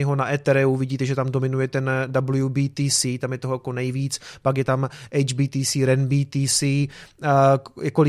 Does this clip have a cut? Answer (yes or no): yes